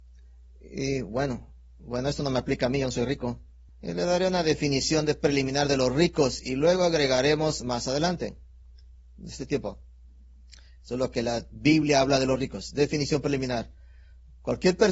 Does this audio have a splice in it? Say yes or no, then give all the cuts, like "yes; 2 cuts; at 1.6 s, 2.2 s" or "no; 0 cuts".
yes; 1 cut; at 3.7 s